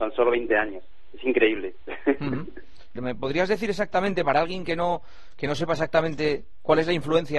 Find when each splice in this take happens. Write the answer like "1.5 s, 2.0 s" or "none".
3.0 s